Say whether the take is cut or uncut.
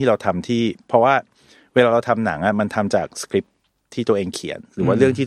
uncut